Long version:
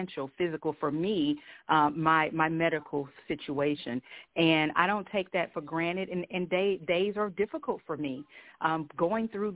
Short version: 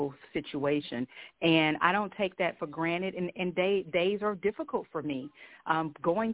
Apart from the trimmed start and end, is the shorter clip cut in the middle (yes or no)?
no